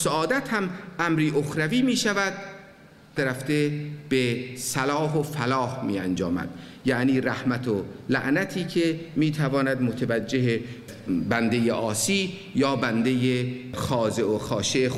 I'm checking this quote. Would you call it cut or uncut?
cut